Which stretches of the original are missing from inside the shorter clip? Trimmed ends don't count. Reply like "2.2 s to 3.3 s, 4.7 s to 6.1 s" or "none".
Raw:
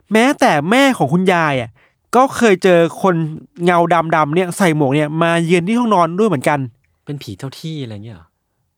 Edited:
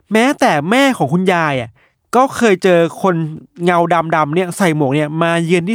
none